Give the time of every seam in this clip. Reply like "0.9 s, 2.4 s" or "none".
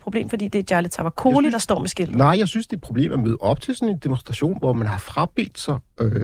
none